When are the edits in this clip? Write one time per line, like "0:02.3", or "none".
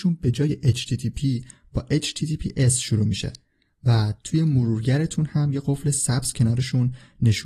none